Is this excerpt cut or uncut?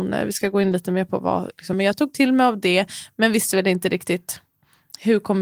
cut